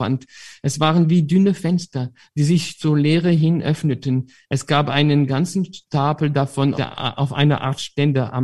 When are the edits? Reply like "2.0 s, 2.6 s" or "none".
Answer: 6.7 s